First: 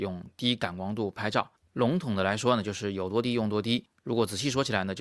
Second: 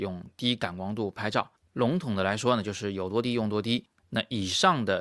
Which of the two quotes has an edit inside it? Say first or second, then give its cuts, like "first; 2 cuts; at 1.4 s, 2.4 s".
second; 1 cut; at 4.0 s